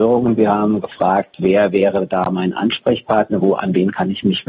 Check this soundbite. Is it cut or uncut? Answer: cut